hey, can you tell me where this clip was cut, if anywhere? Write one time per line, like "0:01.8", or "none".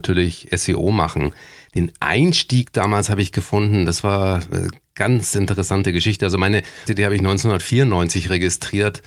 0:06.9